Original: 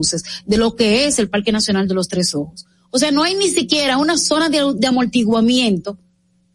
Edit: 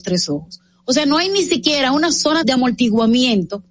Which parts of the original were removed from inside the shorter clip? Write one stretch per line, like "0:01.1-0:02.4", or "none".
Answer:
0:04.5-0:04.8

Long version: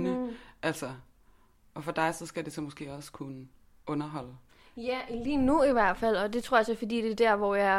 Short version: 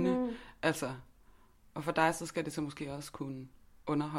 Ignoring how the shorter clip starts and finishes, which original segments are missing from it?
none

